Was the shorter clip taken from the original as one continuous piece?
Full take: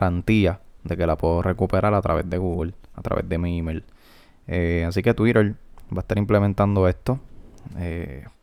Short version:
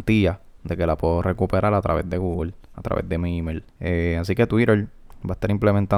no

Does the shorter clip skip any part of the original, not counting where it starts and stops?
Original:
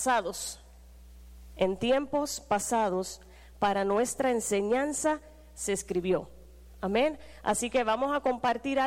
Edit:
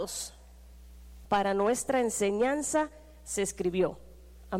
yes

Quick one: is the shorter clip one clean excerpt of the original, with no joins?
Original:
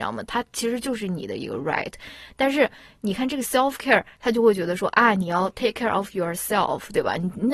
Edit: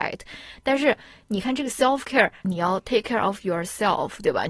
no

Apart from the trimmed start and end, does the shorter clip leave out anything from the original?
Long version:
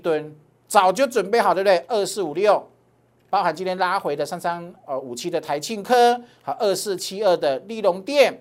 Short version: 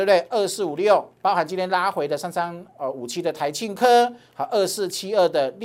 yes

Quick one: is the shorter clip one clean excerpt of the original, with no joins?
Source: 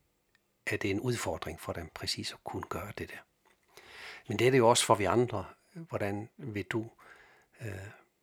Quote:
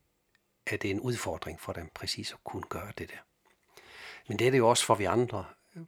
yes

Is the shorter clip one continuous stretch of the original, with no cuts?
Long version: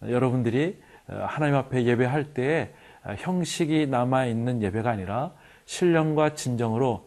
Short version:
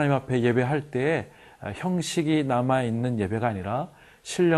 yes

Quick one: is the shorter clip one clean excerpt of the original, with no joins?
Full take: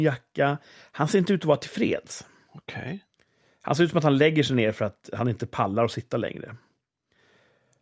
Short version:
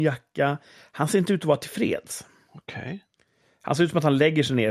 yes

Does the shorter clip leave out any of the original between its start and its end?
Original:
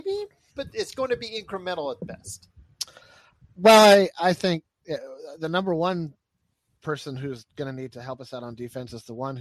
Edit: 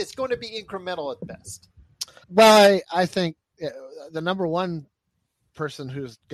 yes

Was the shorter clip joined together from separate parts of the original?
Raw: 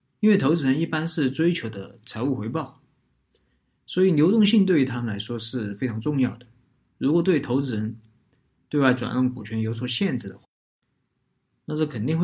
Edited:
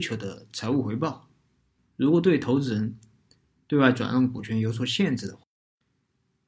yes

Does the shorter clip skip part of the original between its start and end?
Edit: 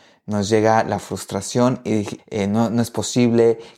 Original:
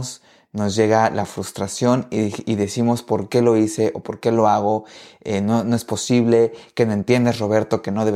yes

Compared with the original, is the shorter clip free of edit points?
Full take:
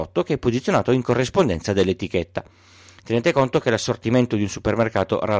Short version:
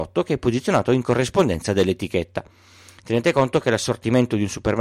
yes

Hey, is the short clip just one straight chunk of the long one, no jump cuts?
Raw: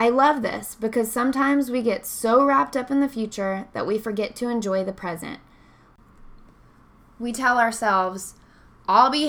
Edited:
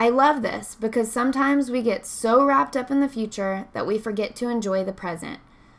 yes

